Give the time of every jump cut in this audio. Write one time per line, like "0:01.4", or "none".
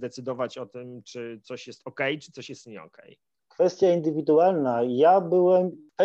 none